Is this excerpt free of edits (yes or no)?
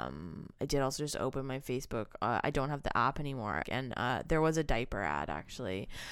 no